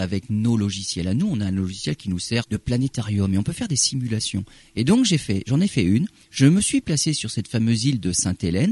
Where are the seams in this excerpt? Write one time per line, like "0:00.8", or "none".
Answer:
0:02.4